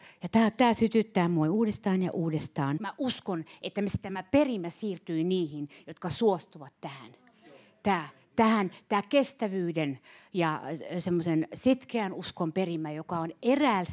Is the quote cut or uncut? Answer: cut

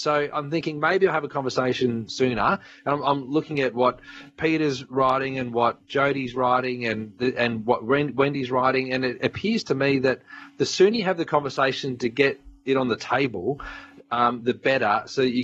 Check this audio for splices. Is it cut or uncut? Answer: uncut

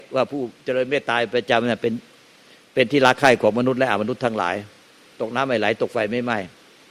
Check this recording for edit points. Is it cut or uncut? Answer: uncut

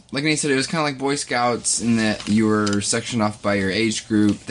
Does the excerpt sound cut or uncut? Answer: uncut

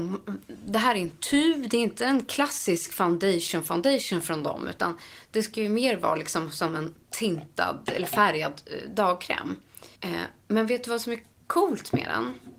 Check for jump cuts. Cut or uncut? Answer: cut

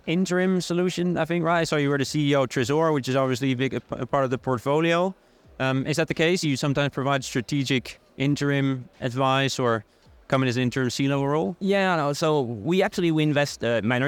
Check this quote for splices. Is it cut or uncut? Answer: uncut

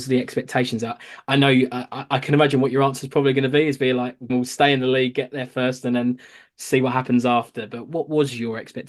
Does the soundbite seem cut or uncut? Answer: cut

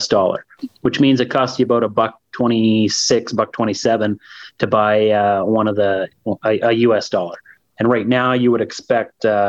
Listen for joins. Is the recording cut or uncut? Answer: cut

